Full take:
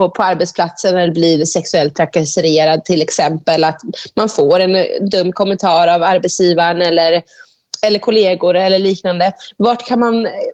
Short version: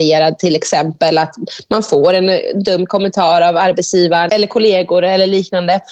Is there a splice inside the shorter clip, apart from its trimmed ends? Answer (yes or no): yes